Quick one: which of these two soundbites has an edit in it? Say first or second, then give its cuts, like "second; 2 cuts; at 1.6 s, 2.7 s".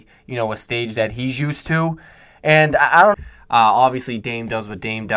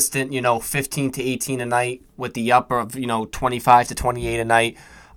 first; 1 cut; at 3.1 s